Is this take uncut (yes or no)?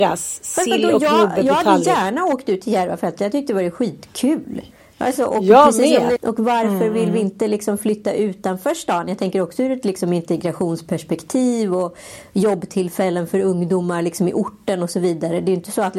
no